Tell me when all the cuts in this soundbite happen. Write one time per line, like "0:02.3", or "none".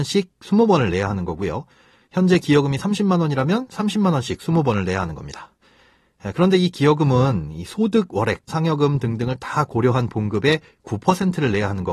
0:08.5